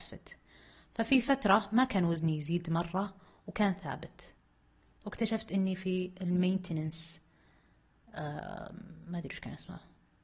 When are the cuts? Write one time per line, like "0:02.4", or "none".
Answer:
none